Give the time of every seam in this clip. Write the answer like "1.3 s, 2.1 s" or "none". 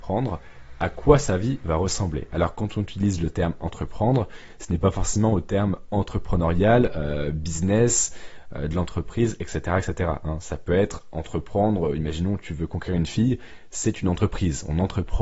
none

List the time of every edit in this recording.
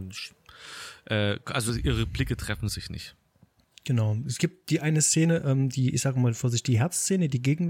none

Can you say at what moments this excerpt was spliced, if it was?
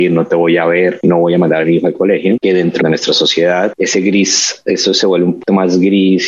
none

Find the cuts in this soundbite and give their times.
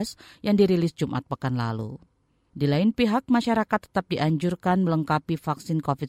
2.5 s

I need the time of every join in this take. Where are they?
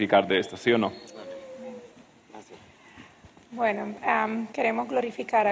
4.5 s

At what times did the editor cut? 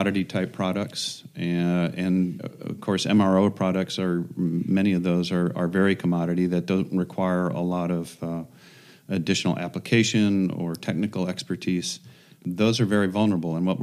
none

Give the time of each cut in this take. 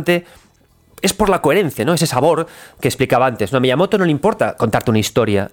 1.8 s

